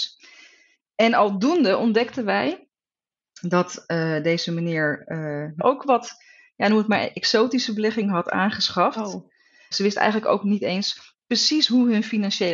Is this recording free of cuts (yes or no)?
no